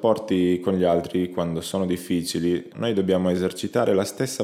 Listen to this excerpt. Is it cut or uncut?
cut